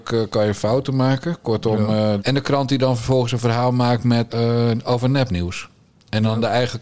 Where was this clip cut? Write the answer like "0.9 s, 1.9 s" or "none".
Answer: 2.2 s, 4.3 s